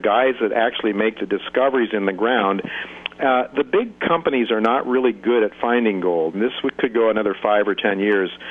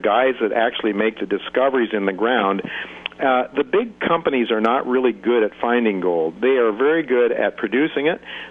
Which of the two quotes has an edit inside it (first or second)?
first